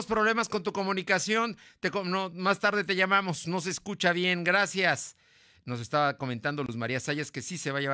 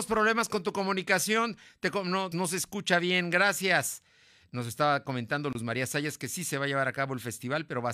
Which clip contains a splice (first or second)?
second